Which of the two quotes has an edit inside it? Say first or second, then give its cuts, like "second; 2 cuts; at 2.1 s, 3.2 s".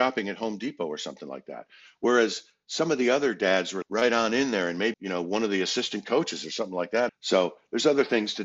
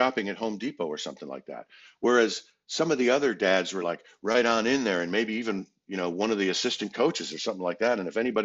first; 3 cuts; at 3.8 s, 4.9 s, 7.1 s